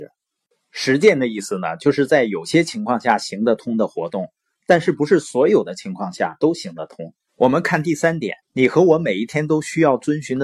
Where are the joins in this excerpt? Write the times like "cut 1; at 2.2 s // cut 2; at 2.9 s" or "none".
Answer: cut 1; at 7.3 s // cut 2; at 8.4 s